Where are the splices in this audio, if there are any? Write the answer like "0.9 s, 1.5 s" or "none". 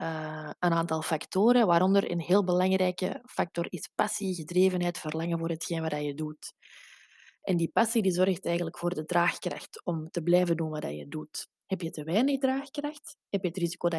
none